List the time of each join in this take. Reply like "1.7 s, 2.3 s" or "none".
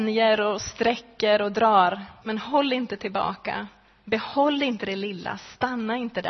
2.2 s

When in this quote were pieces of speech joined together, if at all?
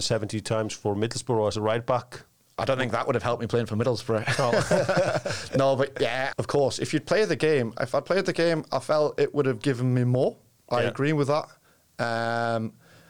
6.3 s

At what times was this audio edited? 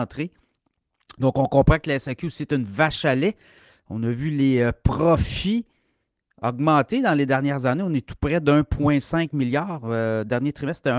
none

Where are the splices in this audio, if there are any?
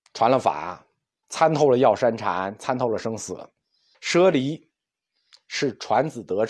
1.2 s, 3.9 s

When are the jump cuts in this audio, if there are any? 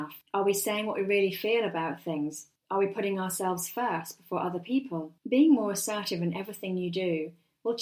5.2 s

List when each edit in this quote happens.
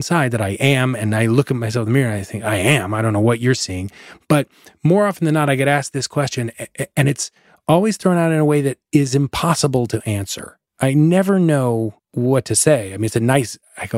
10.7 s, 12.0 s

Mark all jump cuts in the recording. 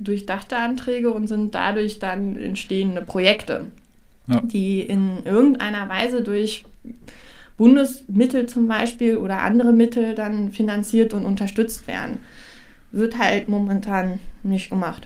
none

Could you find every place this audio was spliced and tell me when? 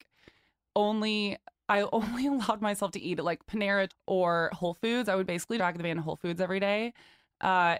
3.9 s, 5.6 s

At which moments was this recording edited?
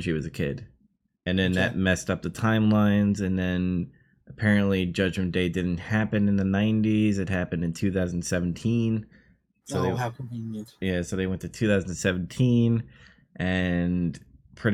1.2 s

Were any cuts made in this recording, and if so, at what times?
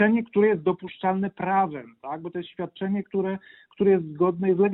none

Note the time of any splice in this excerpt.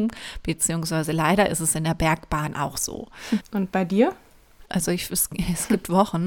3.4 s, 4.7 s

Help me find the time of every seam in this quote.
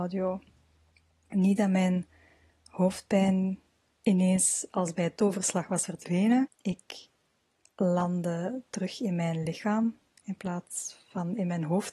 6.5 s

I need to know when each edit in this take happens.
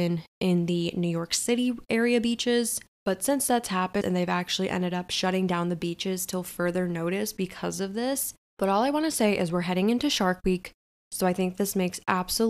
4.0 s

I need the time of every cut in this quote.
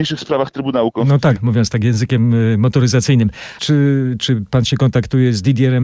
1.4 s, 3.6 s

